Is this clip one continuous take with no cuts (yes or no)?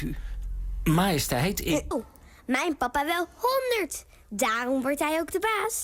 no